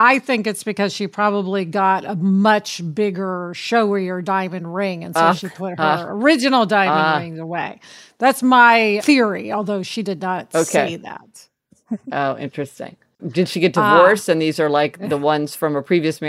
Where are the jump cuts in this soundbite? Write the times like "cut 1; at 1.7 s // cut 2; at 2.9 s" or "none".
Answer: cut 1; at 13.2 s